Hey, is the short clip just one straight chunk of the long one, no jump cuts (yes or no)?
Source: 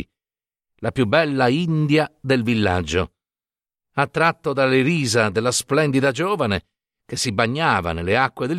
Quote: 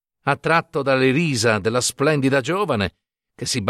yes